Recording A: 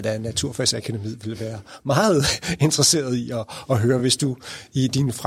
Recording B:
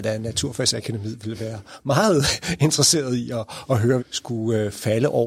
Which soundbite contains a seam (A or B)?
B